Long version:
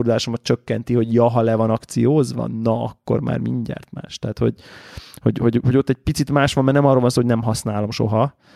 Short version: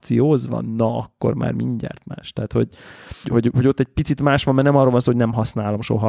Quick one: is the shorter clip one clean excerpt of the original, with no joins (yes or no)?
no